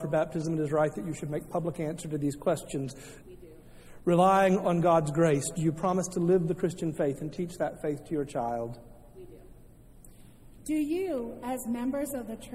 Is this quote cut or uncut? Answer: cut